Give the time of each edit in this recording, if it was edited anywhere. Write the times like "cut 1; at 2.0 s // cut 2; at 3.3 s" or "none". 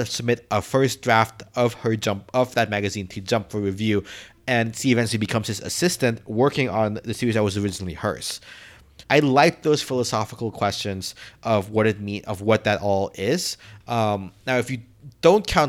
cut 1; at 9.0 s // cut 2; at 13.8 s